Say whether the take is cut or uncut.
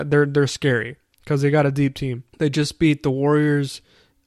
cut